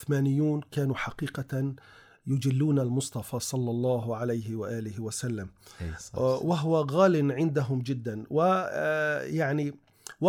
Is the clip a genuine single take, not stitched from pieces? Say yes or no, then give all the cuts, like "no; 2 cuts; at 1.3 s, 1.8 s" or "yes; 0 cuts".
yes; 0 cuts